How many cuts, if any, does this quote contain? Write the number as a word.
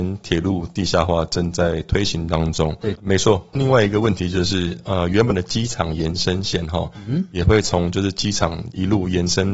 one